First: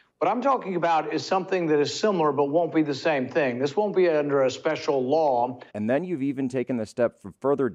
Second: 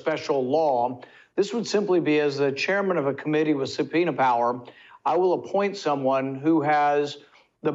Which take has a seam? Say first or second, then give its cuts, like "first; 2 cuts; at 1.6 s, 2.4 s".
first; 1 cut; at 5.7 s